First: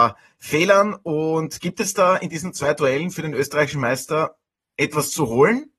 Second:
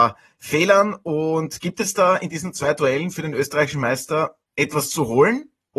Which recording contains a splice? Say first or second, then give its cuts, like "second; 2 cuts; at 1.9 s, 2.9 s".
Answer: second; 1 cut; at 4.5 s